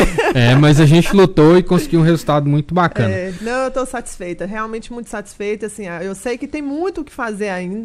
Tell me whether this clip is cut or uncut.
uncut